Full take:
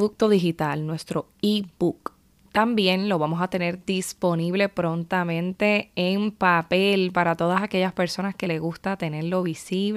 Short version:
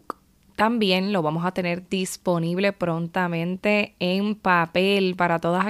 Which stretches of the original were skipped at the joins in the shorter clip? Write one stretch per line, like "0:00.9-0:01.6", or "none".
none